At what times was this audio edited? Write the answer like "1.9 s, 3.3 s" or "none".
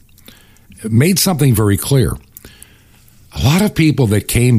none